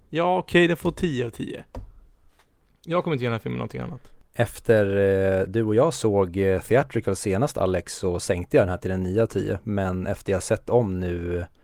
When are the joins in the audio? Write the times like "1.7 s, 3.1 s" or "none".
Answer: none